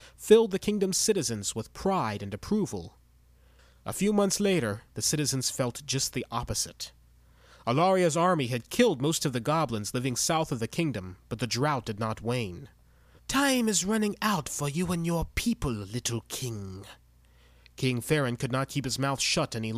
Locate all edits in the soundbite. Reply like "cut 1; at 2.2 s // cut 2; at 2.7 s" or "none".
cut 1; at 4.9 s // cut 2; at 13.2 s